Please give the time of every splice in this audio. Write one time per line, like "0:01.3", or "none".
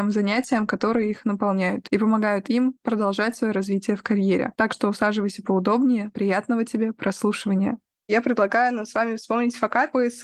none